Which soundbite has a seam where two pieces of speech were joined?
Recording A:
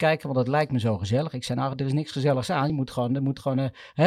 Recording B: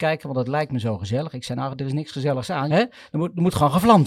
B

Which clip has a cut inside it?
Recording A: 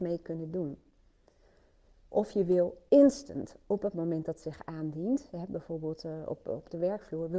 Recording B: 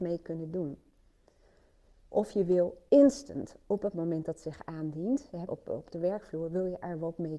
B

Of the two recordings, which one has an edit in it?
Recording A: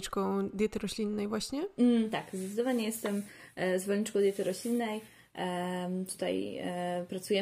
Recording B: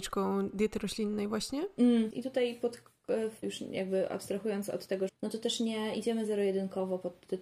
B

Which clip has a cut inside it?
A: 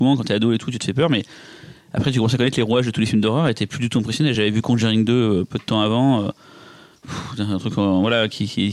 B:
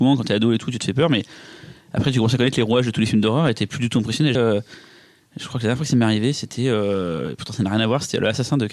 B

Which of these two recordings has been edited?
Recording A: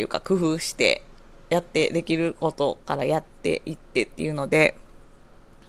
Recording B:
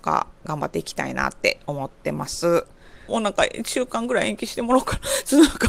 B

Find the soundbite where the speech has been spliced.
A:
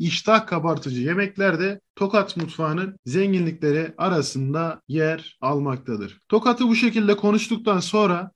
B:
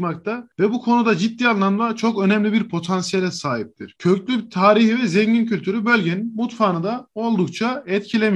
B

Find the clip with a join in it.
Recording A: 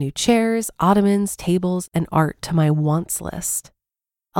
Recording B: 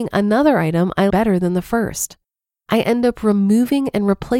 B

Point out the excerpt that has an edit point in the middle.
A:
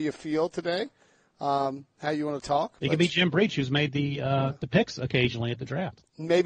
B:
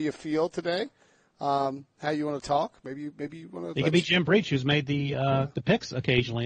A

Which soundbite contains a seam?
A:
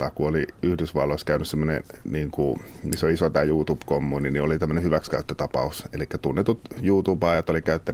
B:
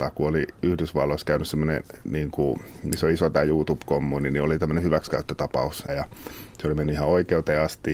B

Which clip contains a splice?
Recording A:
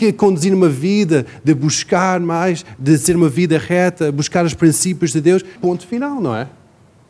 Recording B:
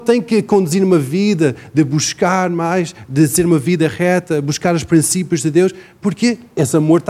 A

